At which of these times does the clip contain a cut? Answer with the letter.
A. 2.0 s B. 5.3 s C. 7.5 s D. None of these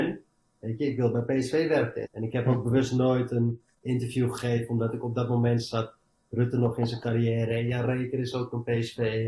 A